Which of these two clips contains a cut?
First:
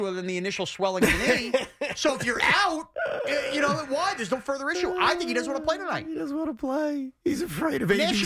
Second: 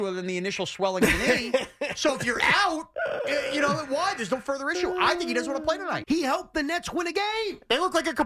second; 1 cut; at 6.0 s

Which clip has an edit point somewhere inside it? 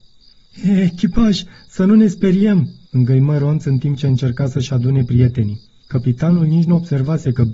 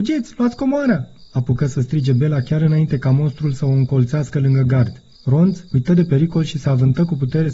second; 1 cut; at 5.7 s

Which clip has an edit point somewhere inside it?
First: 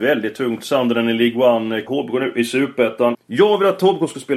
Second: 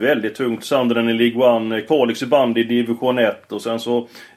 first; 2 cuts; at 1.9 s, 3.1 s

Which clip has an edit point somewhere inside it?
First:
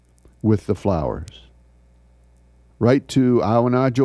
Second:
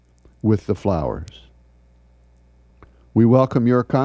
first; 1 cut; at 2.7 s

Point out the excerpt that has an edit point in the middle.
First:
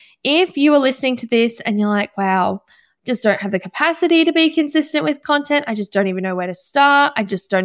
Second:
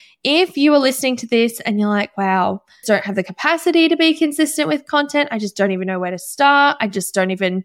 second; 1 cut; at 2.8 s

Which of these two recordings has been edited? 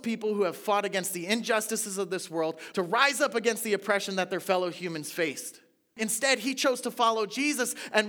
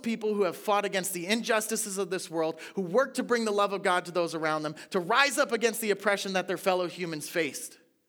first; 2 cuts; at 2.7 s, 6.0 s

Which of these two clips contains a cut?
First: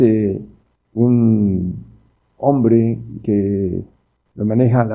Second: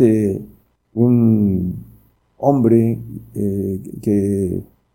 first; 1 cut; at 3.2 s

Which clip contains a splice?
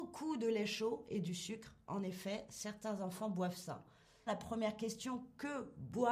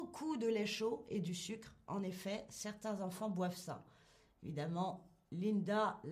first; 1 cut; at 4.3 s

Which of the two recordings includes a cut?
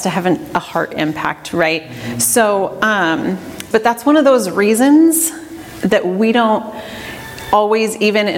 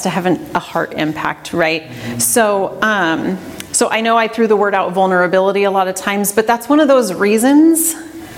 first; 1 cut; at 3.7 s

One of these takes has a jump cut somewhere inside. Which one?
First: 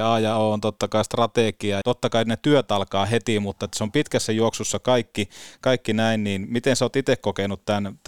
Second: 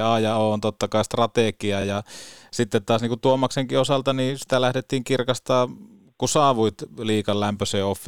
first; 1 cut; at 1.8 s

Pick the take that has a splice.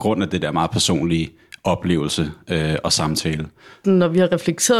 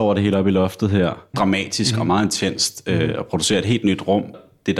second; 1 cut; at 1.3 s

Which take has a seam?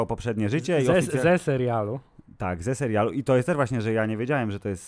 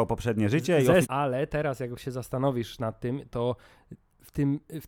second; 1 cut; at 1.0 s

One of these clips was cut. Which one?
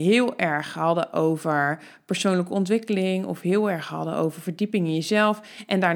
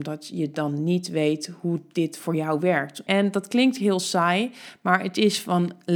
second; 1 cut; at 3.1 s

